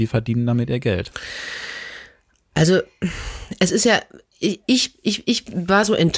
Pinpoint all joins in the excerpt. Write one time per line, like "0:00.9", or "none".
none